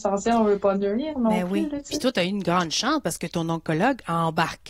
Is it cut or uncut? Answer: uncut